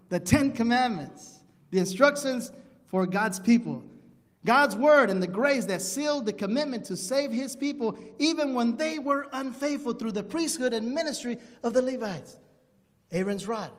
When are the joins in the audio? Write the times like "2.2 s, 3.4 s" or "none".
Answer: 4.3 s

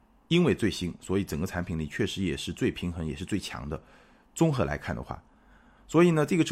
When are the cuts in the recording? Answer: none

